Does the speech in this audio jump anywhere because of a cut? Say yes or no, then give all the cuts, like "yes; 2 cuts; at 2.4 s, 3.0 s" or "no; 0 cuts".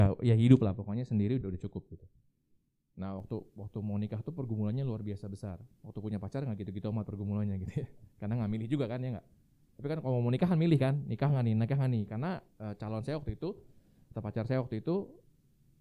yes; 2 cuts; at 1.4 s, 5.7 s